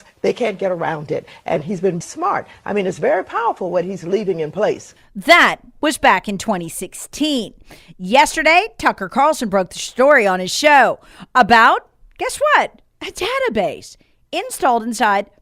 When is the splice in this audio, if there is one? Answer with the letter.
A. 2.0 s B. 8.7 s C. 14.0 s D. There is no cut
A